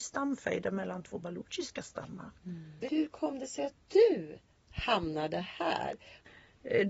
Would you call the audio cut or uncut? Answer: uncut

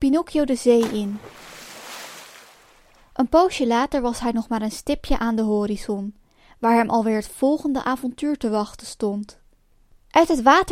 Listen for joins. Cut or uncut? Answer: uncut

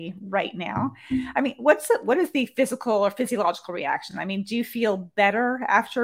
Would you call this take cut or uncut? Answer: uncut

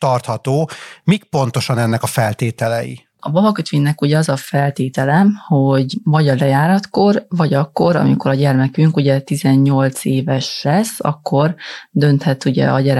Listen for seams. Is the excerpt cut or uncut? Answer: cut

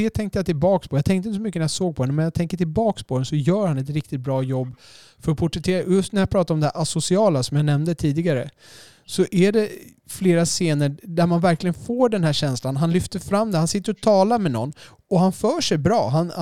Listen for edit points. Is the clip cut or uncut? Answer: cut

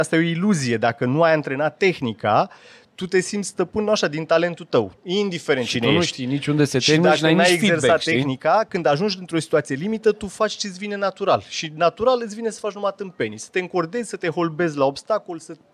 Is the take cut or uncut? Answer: cut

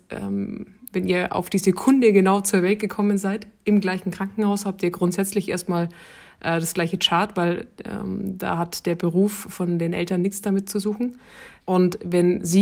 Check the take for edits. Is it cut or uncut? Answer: cut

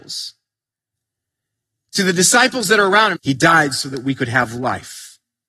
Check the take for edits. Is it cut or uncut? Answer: cut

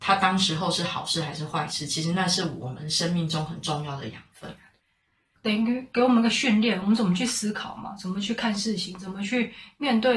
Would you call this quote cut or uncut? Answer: uncut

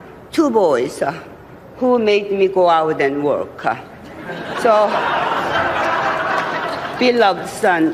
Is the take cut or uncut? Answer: uncut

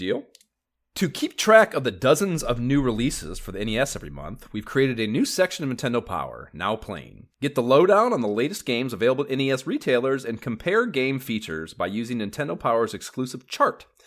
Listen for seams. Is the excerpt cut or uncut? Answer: cut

